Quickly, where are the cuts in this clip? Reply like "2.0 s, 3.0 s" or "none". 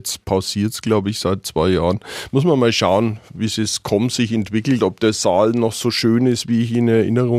none